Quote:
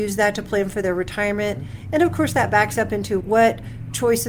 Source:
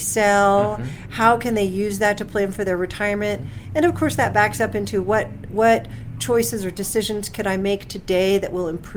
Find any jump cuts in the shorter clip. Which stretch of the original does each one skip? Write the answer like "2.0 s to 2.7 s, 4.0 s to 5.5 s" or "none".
5.0 s to 5.5 s